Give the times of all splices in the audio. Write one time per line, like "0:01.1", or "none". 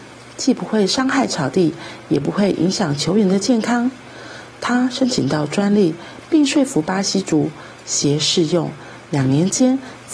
none